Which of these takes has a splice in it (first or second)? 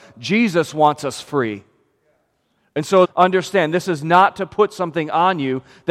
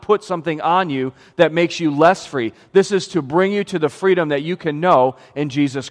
first